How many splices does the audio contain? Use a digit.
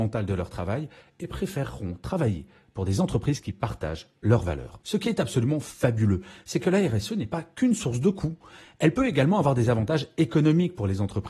0